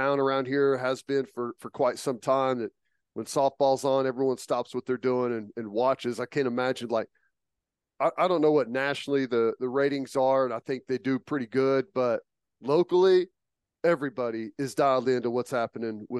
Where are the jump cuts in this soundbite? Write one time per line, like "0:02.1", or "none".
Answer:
none